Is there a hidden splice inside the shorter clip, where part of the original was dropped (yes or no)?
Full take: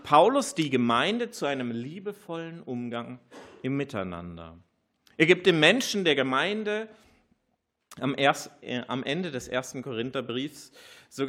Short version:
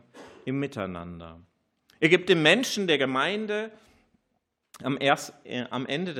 no